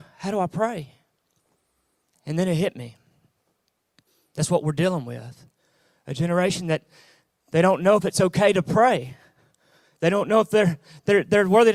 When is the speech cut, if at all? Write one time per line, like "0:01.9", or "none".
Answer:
none